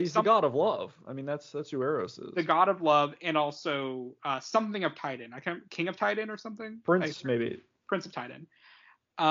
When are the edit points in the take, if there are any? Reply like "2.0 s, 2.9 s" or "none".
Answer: none